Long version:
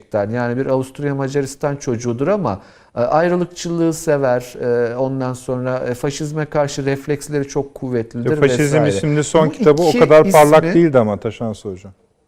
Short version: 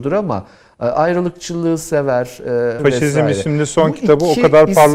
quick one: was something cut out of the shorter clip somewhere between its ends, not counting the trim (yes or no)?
yes